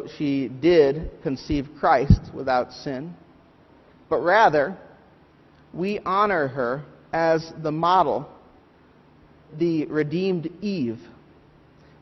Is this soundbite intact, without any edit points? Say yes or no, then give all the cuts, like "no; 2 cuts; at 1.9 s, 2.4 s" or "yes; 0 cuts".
no; 1 cut; at 9.5 s